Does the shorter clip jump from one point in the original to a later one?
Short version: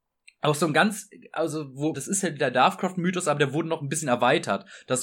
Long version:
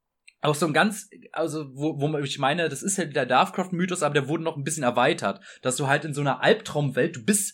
yes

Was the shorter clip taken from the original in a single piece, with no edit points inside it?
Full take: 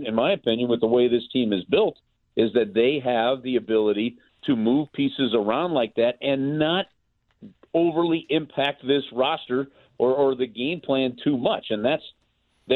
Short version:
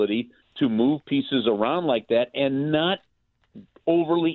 yes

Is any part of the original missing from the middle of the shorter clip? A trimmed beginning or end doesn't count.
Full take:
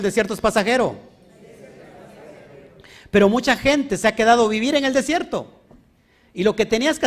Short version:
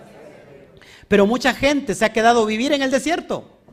no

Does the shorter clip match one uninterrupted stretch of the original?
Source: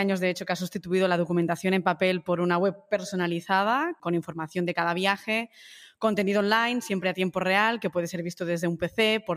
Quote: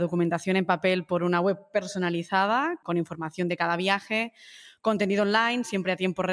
yes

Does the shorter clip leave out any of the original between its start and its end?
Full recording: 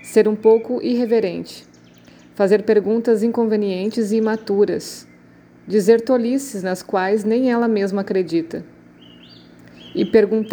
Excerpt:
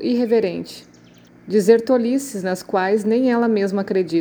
yes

